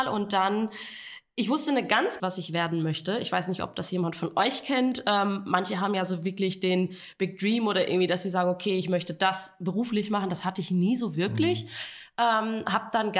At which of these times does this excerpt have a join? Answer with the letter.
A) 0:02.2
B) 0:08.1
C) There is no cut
A